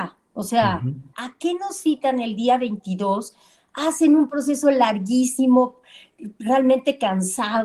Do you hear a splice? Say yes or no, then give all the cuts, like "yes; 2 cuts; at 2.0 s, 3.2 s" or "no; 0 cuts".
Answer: yes; 1 cut; at 1.1 s